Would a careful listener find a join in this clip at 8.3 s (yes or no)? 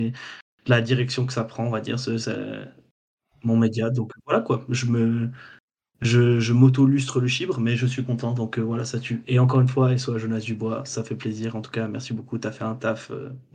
no